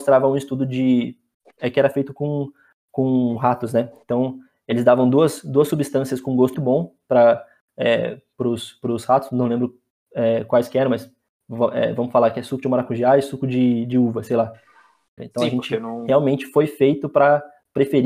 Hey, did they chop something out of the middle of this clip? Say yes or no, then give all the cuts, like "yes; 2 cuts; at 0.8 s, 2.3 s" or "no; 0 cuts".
yes; 2 cuts; at 6.5 s, 15.2 s